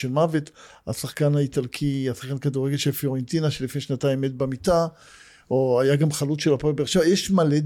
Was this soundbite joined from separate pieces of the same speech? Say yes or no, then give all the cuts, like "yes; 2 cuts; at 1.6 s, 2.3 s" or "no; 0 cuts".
no; 0 cuts